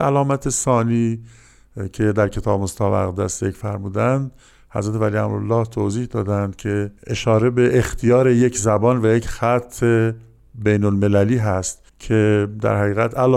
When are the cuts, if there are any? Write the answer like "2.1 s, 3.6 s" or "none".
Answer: 7.0 s, 11.9 s